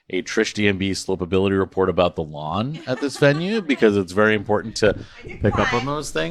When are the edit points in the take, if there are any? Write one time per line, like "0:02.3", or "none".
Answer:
none